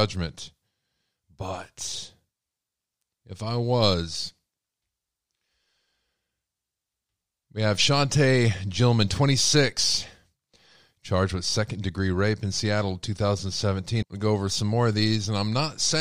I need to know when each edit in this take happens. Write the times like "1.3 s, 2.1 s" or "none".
14.0 s